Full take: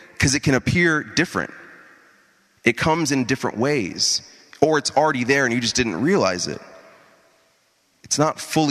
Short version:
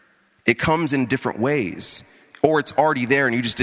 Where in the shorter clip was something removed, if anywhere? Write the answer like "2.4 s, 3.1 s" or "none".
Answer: none